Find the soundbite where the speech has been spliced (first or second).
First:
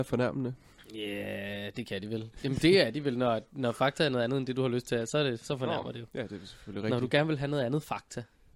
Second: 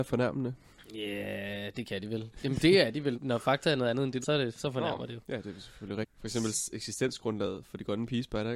second